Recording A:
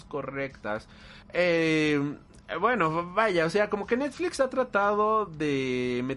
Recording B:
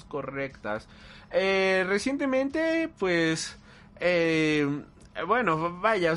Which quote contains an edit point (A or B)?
A